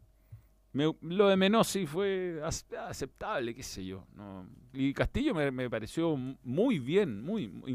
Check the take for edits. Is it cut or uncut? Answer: cut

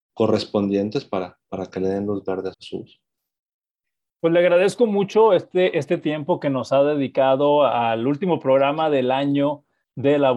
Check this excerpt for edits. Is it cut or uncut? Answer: cut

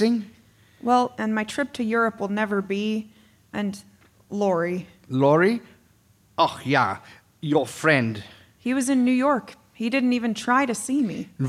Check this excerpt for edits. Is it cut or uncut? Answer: cut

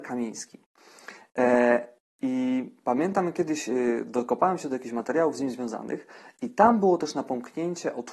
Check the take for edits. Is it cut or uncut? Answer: uncut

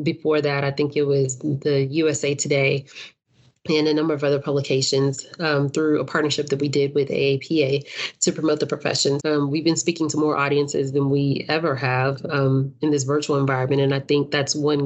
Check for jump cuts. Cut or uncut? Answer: cut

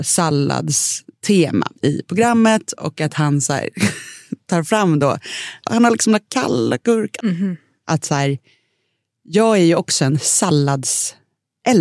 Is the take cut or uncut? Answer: cut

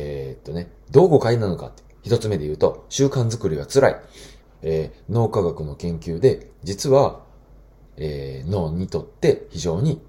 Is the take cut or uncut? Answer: cut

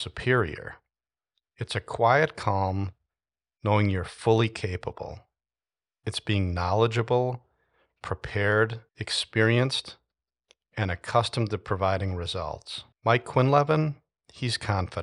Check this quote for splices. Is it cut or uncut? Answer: cut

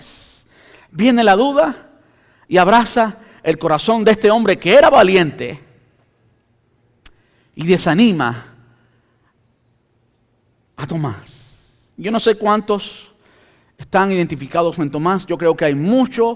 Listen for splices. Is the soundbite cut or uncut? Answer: cut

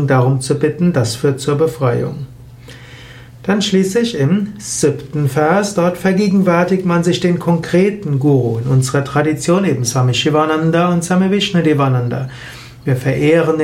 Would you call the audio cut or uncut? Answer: uncut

